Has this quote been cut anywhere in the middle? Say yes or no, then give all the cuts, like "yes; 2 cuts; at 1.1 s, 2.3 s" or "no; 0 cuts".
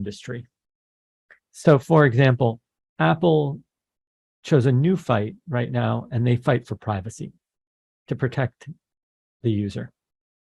no; 0 cuts